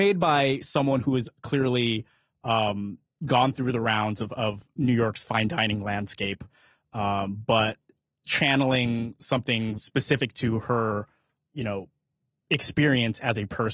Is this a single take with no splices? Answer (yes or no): no